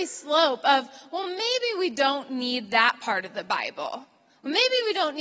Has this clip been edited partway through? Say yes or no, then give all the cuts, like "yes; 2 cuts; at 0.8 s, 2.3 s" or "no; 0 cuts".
no; 0 cuts